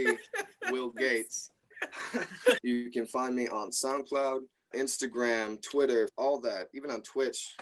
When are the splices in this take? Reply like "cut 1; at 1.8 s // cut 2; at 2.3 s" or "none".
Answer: cut 1; at 2.6 s // cut 2; at 4.7 s // cut 3; at 6.1 s

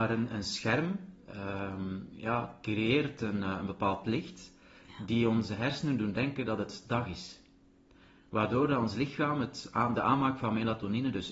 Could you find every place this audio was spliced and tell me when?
none

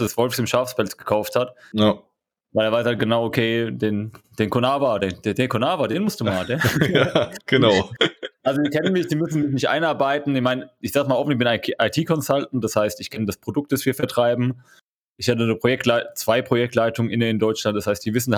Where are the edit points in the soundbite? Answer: none

